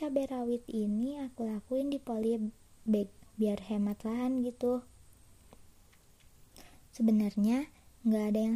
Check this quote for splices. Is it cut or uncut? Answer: cut